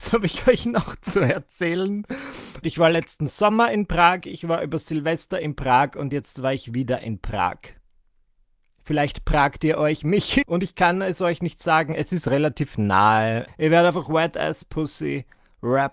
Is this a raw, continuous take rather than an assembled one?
no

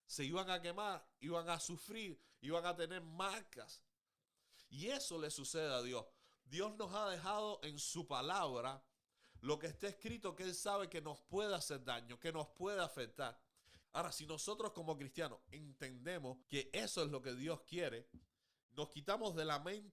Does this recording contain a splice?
yes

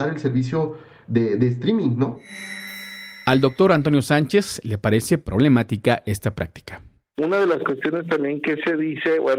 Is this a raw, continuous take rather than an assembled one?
yes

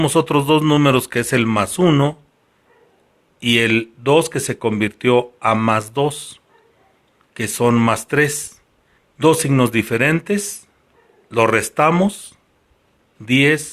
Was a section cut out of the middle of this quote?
yes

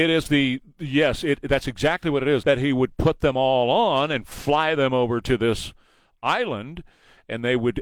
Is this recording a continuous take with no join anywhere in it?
no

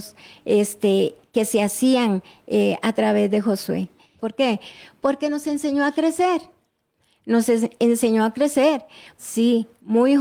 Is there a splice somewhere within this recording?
yes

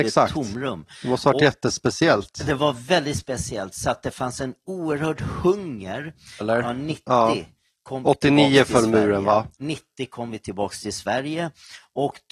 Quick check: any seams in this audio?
yes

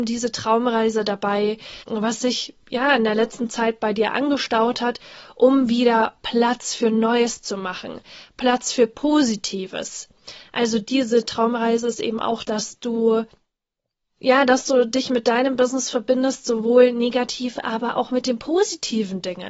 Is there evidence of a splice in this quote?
yes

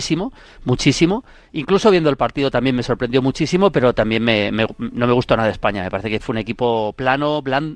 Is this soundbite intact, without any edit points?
yes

